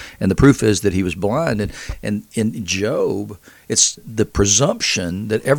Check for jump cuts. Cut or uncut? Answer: cut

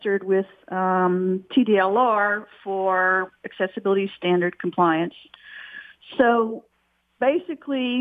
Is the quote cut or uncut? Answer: uncut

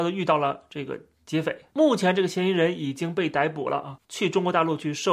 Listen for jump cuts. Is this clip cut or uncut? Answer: cut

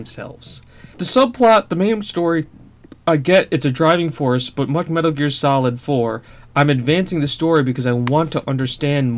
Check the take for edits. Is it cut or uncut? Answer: cut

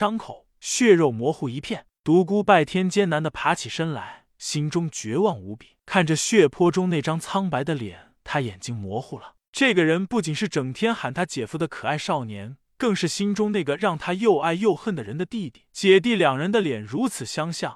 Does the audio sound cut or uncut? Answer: uncut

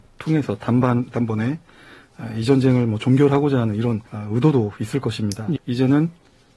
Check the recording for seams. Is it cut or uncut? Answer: cut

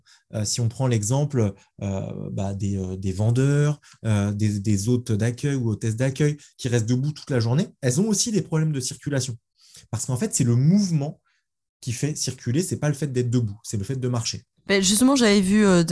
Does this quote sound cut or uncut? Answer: uncut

